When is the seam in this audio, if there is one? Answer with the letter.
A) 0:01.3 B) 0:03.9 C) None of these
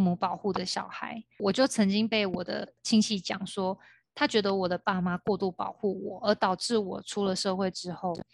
C